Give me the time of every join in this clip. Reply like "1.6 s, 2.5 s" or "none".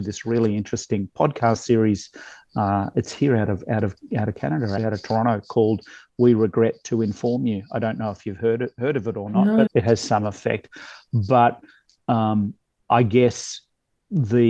4.8 s, 9.7 s